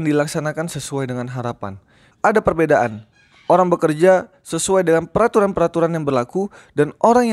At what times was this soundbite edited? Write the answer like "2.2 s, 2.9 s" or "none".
2.1 s